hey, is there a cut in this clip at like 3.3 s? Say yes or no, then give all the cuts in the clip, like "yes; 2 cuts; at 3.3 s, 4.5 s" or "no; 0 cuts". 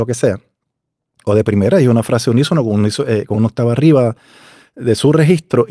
yes; 1 cut; at 3.3 s